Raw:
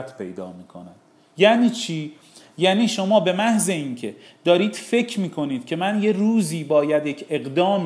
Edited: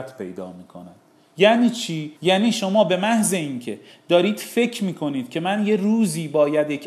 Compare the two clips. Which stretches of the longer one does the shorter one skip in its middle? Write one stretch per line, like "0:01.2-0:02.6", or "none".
0:02.2-0:02.5